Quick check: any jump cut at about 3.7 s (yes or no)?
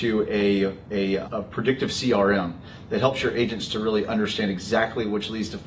no